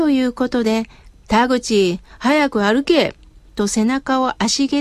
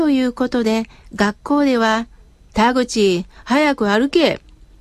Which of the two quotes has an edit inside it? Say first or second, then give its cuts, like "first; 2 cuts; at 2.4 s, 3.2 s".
first; 1 cut; at 1.1 s